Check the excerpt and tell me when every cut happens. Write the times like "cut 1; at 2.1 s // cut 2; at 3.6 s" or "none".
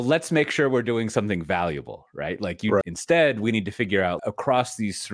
cut 1; at 2.8 s // cut 2; at 4.2 s